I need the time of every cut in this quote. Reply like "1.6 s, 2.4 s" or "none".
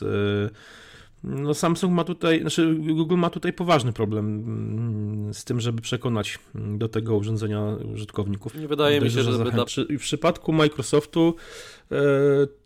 8.5 s, 9.7 s